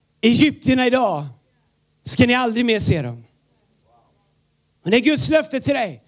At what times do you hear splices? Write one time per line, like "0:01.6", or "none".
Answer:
0:04.8

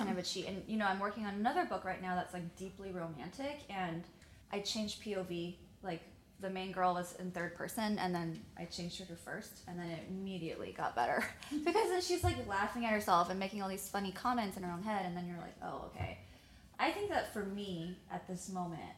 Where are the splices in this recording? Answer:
0:04.4

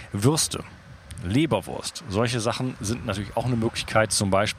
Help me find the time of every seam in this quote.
none

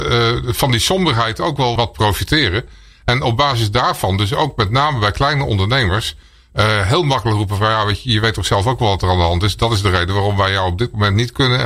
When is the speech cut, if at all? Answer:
0:01.8

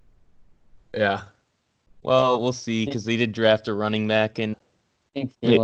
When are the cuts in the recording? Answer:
0:04.5

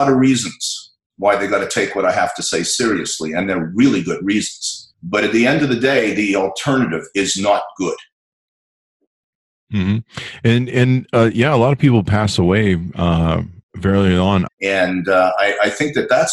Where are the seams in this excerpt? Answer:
0:04.9
0:14.5

